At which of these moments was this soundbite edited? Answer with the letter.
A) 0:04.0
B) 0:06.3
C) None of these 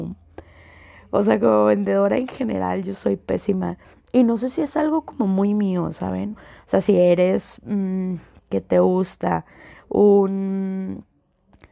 B